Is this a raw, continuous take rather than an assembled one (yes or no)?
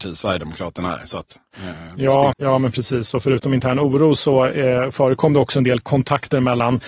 no